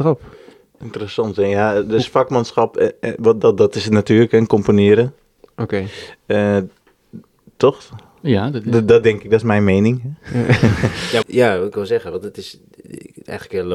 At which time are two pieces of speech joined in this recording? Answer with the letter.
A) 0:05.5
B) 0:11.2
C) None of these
B